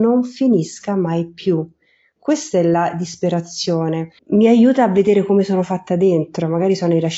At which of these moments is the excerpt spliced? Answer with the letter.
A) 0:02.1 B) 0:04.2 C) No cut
B